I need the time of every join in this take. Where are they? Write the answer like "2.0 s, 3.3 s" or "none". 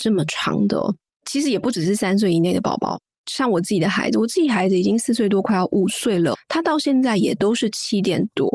1.2 s, 6.3 s

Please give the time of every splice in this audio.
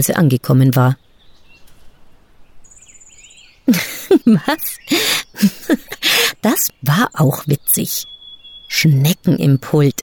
5.3 s, 6.7 s

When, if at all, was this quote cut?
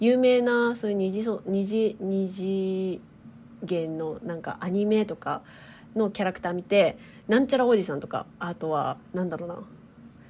8.3 s

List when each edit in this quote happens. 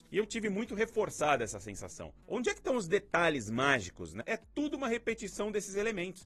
4.2 s

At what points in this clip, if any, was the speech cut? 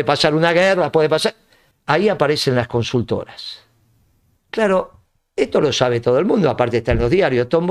1.7 s, 4.4 s

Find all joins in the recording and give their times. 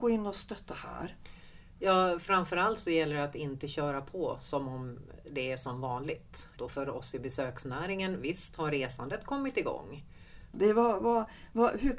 6.6 s, 10.5 s

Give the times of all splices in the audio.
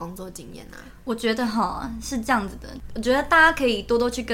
2.9 s

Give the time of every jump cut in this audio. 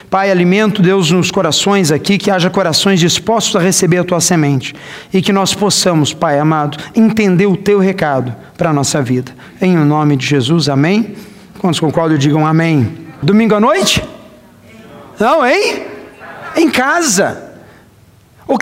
13.2 s

